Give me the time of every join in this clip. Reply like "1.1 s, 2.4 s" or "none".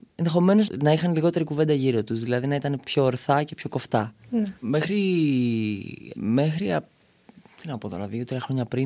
2.8 s, 4.6 s, 6.1 s